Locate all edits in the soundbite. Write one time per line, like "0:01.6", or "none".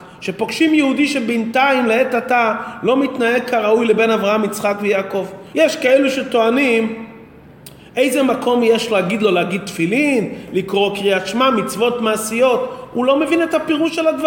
0:05.5